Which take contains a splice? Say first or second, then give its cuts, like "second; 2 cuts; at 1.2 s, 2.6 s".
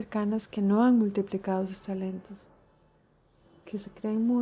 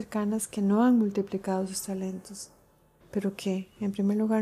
second; 1 cut; at 3.0 s